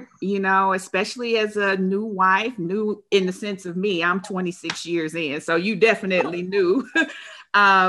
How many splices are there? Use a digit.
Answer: 0